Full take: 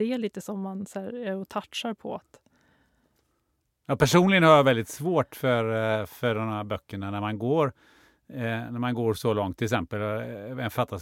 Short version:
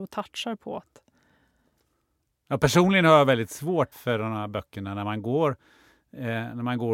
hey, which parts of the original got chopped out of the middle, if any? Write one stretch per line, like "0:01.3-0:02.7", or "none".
0:05.3-0:06.1